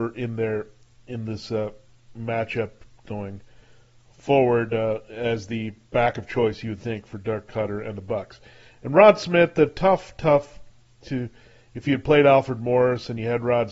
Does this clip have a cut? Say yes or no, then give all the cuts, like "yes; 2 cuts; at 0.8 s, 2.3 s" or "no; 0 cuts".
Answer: no; 0 cuts